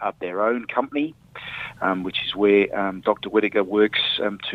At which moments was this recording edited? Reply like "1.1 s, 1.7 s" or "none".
none